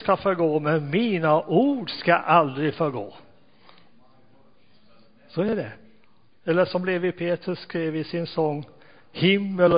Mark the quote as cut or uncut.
cut